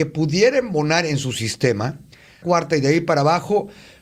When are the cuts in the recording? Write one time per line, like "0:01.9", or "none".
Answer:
0:02.4